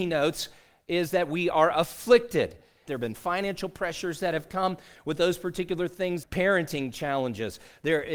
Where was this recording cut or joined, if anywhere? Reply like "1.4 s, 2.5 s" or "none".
2.9 s, 6.2 s